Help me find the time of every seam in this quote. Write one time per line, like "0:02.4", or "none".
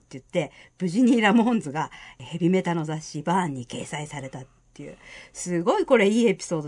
none